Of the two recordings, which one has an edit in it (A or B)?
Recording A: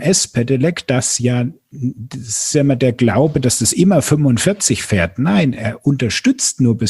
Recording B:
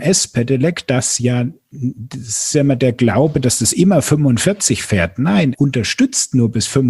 B